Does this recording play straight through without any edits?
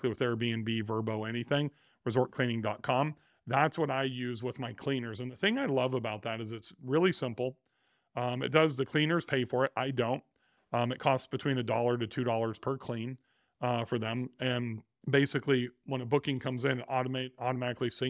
yes; 0 cuts

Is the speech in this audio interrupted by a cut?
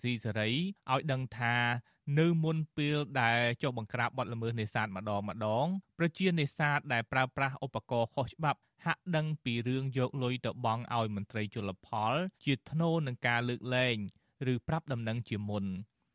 yes; 1 cut; at 12.4 s

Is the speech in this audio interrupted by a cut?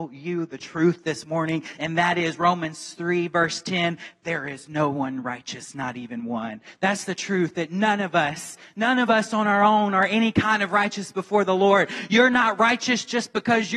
no; 0 cuts

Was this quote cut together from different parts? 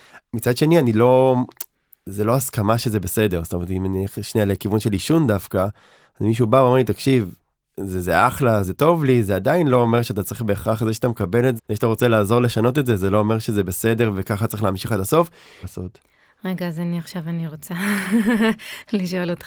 yes; 3 cuts; at 8.6 s, 11.6 s, 15.6 s

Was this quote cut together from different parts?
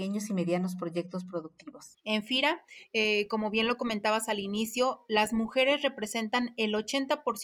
yes; 1 cut; at 1.9 s

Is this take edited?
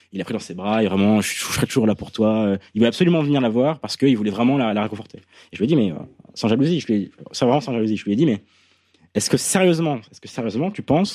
no; 0 cuts

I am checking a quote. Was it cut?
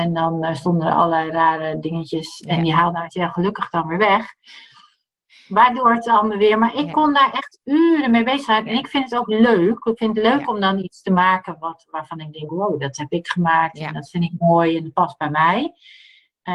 no; 0 cuts

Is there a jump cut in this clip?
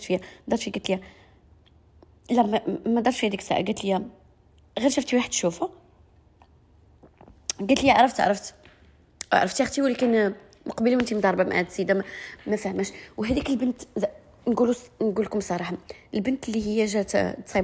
no; 0 cuts

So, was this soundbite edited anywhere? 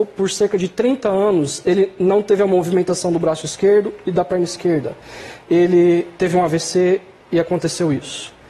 no; 0 cuts

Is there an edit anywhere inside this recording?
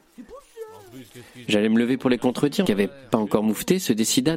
yes; 2 cuts; at 1.5 s, 2.6 s

